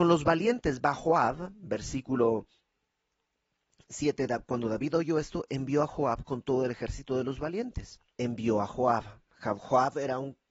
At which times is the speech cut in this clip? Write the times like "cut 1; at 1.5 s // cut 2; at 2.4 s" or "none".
cut 1; at 8.2 s